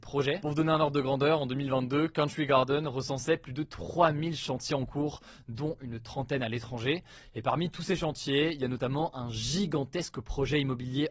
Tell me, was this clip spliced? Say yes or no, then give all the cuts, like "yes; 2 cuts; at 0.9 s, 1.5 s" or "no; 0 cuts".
no; 0 cuts